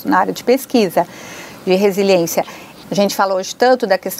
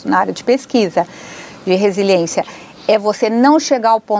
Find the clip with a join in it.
first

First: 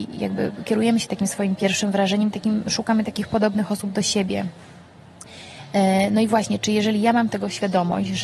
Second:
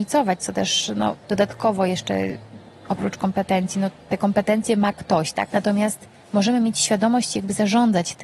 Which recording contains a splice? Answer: second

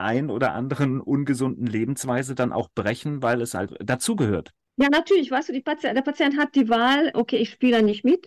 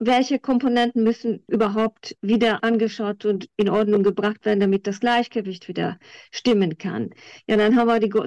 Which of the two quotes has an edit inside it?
first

